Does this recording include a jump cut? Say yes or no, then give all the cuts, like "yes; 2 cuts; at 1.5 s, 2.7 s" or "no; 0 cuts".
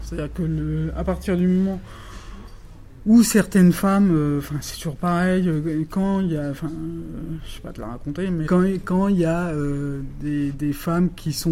yes; 2 cuts; at 8.5 s, 10.5 s